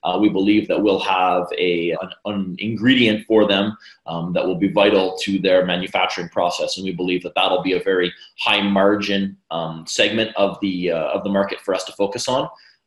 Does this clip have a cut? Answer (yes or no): yes